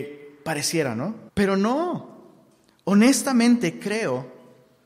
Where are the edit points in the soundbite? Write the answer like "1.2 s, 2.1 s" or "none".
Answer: 1.3 s